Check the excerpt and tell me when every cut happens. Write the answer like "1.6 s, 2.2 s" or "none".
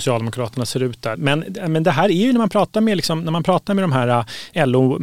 1.2 s

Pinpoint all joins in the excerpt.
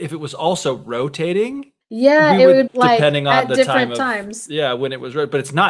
2.7 s

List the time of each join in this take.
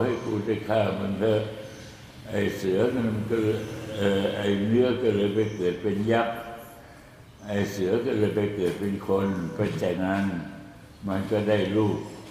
10.0 s

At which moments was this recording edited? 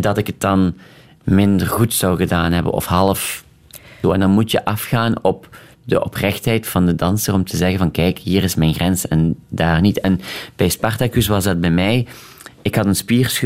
4.0 s

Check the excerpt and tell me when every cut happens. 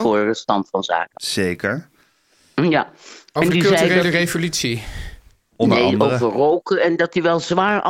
none

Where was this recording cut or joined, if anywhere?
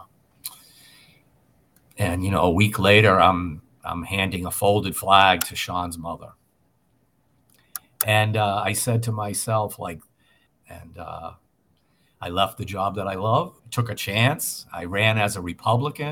10.5 s, 13.6 s

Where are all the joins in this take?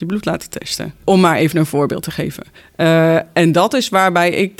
none

